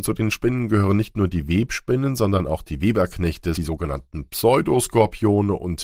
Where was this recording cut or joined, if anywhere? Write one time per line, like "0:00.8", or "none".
0:03.5